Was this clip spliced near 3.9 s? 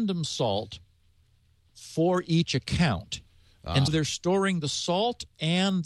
yes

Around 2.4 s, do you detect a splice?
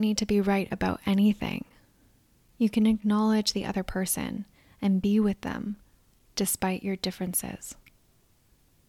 yes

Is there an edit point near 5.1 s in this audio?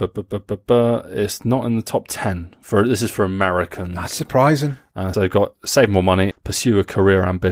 yes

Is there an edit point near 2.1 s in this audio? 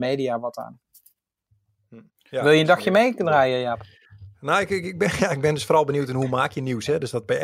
yes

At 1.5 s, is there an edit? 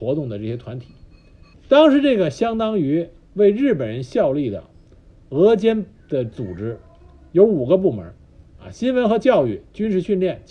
yes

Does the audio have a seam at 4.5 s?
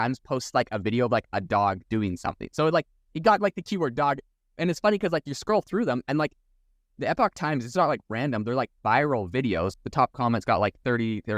no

